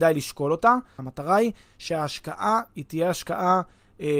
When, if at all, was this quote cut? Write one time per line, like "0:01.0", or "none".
0:01.0

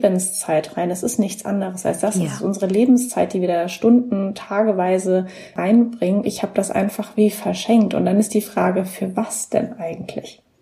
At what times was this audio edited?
0:06.2

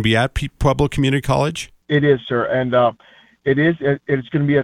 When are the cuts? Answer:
none

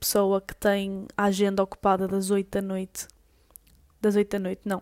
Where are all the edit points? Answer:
none

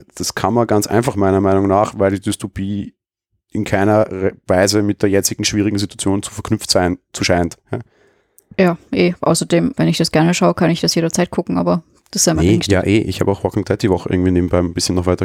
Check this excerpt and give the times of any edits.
0:09.7

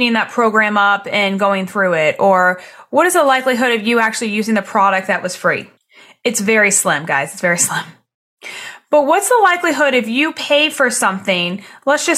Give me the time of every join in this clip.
none

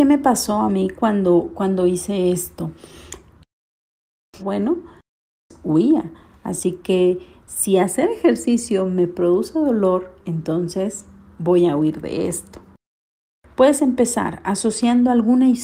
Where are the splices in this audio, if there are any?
0:04.4

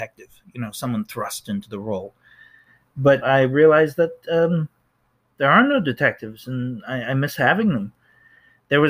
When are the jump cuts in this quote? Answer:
0:03.2

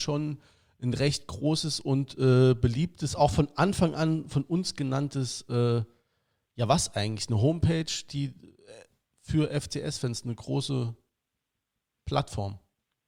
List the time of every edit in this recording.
none

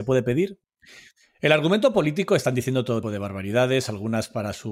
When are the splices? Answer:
0:03.0

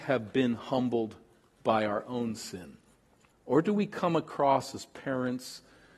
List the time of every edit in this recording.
0:03.3

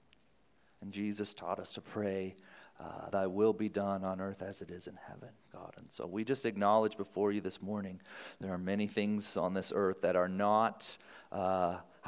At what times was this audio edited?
0:03.1

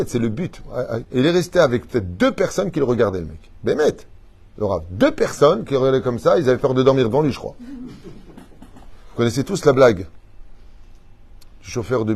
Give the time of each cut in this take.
0:01.0

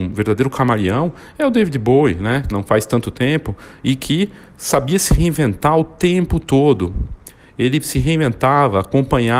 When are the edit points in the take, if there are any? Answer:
0:02.5

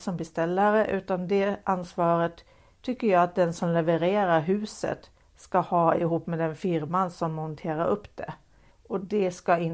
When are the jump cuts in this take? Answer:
0:08.7

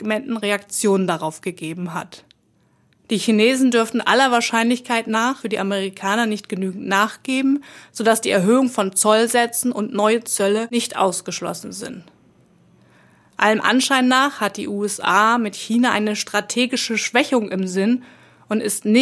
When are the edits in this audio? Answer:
0:03.0

